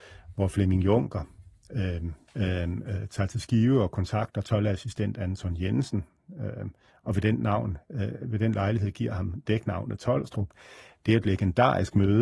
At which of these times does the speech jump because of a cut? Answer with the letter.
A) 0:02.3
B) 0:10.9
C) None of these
A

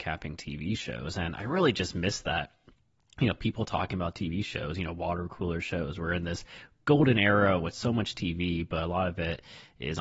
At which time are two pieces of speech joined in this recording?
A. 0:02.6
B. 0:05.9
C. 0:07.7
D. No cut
D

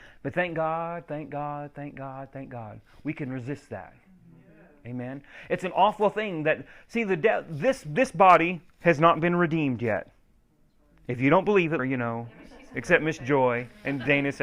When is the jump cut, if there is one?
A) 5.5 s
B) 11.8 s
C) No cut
B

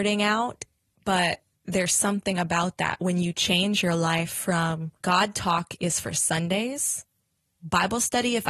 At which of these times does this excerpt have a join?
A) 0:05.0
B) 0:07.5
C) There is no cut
A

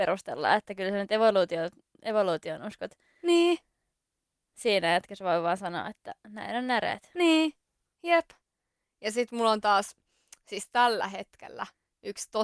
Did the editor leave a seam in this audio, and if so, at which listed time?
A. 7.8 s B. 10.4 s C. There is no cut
A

